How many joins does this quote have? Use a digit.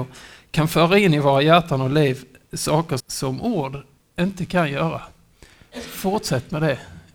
1